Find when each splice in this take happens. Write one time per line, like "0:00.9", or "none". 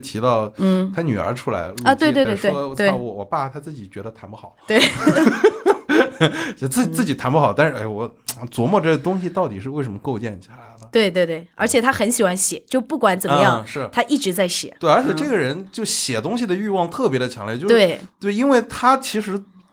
0:02.3

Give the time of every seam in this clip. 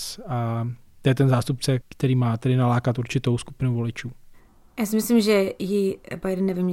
none

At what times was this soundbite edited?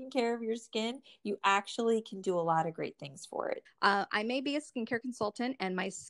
0:03.7

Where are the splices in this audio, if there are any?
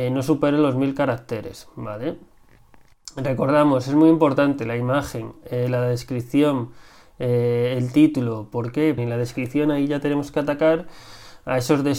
0:09.0

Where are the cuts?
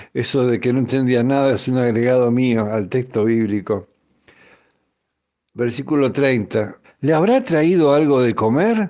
0:06.8

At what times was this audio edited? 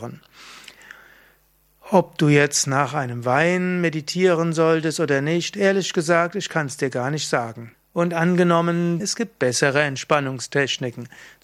0:07.7
0:09.0

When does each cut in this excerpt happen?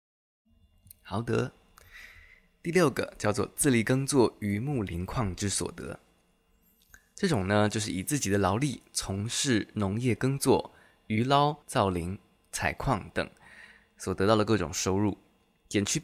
0:11.6

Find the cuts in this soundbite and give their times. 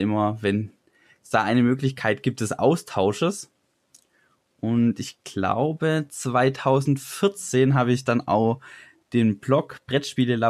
none

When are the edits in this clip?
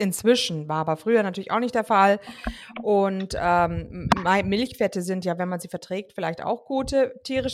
none

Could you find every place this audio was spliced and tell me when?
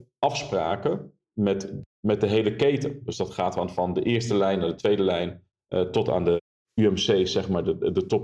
none

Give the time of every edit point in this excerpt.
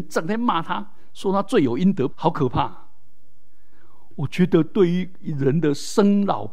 0:02.1

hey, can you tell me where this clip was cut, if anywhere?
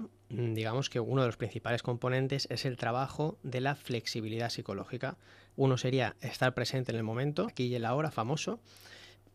0:05.5
0:07.5

